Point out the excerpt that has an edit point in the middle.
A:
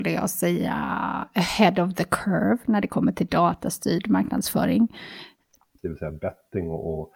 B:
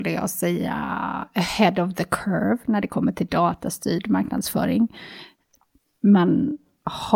A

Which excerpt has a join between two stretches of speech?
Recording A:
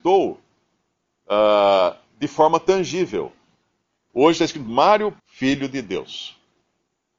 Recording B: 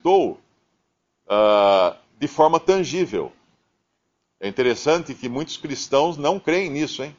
A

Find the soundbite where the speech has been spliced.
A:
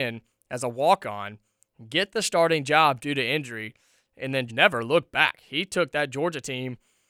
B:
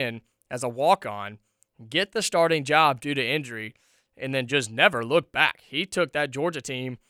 A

